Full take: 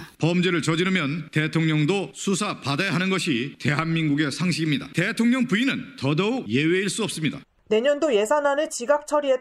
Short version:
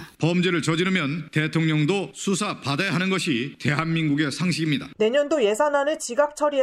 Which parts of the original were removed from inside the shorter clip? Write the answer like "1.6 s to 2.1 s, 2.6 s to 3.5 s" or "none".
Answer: 4.9 s to 7.6 s